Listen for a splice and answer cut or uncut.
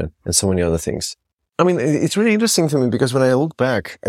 uncut